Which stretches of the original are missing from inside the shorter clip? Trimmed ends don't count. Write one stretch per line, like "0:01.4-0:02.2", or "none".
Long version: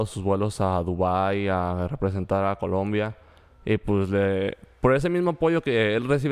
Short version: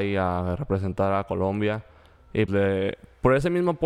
0:03.8-0:04.1